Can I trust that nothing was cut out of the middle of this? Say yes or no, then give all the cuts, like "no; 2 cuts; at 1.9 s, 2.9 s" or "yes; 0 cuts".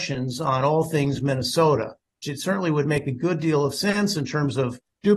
no; 1 cut; at 2.2 s